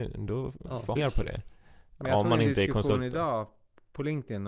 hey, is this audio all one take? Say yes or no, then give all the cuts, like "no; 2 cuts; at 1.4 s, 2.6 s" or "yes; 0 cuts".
no; 1 cut; at 1.0 s